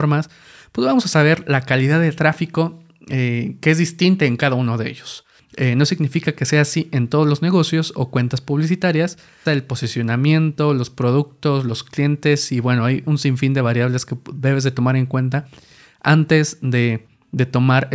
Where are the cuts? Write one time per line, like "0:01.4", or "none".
0:05.4
0:09.5